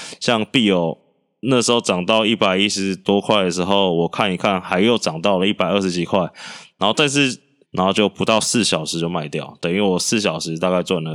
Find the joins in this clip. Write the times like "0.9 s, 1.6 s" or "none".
7.6 s